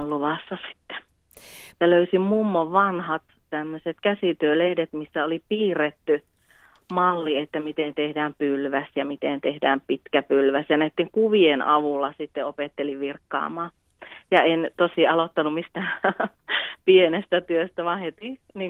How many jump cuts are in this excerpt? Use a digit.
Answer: 1